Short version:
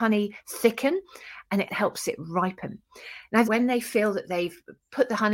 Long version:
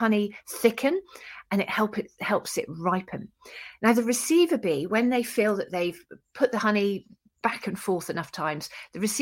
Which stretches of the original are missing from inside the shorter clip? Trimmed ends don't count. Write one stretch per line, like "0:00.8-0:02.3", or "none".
0:01.7-0:02.2
0:03.9-0:04.9